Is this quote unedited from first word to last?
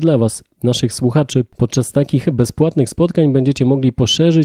yes; 0 cuts

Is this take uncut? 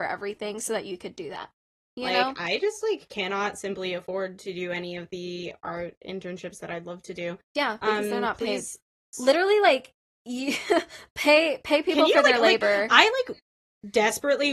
no; 1 cut; at 9.1 s

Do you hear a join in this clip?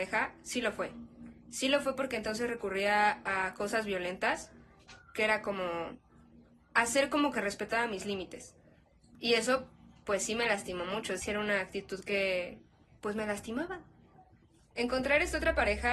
yes; 1 cut; at 11.2 s

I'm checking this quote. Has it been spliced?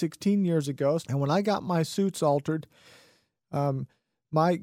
yes; 1 cut; at 1.0 s

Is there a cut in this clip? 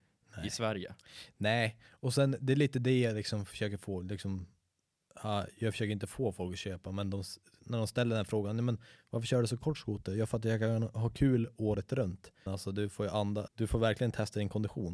yes; 2 cuts; at 12.5 s, 13.5 s

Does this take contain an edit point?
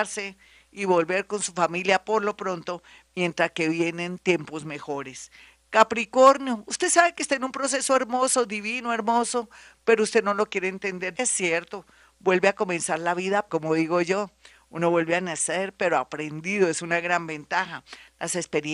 yes; 2 cuts; at 11.2 s, 13.5 s

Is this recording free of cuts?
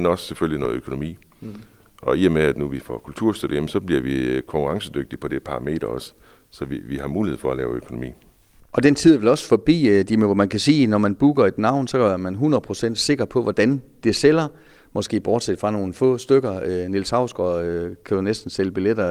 yes; 0 cuts

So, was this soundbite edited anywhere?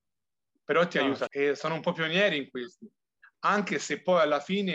yes; 1 cut; at 1.3 s

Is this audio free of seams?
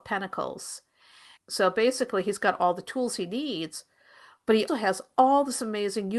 no; 2 cuts; at 1.4 s, 4.7 s

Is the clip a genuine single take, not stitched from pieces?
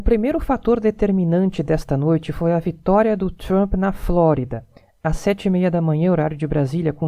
yes; 0 cuts

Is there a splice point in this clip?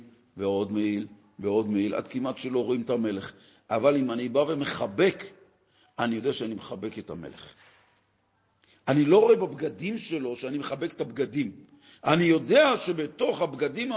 no; 0 cuts

